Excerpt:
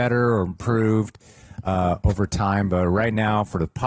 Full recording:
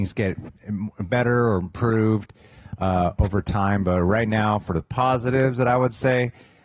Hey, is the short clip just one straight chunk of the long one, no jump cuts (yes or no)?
yes